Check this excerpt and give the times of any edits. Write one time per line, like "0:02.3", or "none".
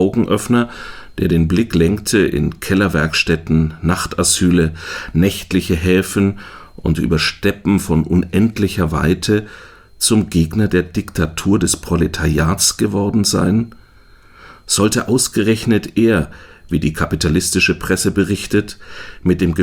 none